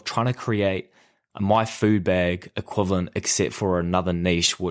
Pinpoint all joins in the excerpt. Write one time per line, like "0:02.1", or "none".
none